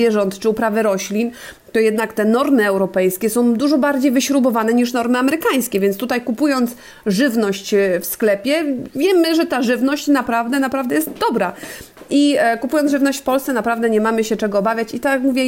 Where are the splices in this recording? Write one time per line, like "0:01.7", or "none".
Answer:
none